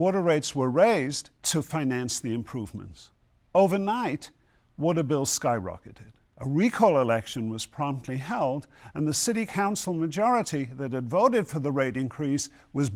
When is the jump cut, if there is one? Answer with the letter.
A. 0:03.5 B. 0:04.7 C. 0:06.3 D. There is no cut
D